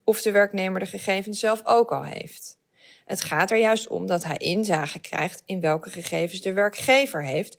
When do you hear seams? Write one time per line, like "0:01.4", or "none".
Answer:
none